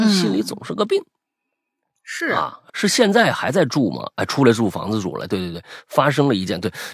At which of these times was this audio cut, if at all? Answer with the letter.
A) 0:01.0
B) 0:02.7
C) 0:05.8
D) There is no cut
B